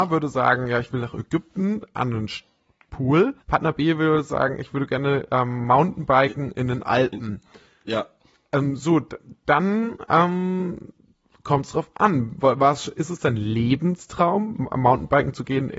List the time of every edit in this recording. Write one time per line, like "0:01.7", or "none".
0:03.4